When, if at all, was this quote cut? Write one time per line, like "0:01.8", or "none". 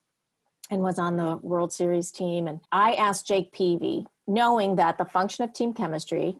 0:02.6